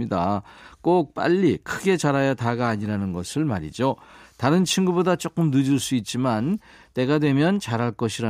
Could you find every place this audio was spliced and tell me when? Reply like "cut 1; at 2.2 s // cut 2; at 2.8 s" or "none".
none